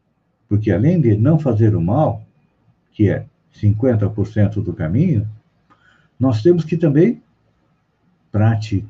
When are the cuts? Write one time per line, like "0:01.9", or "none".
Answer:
none